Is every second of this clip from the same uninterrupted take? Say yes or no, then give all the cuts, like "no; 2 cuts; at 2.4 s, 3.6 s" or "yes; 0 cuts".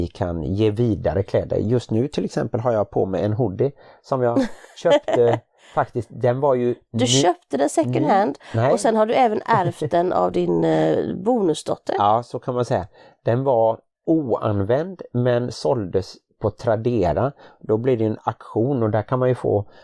yes; 0 cuts